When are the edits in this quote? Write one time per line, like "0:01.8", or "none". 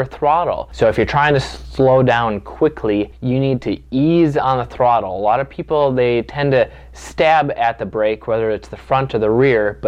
0:03.1